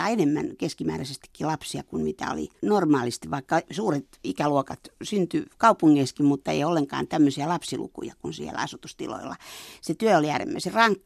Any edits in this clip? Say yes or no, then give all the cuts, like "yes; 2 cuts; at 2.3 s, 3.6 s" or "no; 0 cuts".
no; 0 cuts